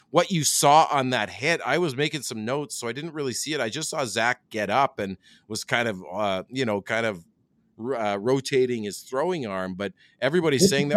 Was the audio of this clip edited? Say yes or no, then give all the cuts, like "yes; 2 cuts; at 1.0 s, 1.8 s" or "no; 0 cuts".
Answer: no; 0 cuts